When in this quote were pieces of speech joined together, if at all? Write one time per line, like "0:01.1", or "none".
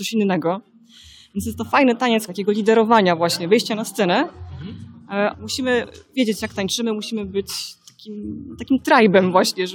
0:02.3
0:05.3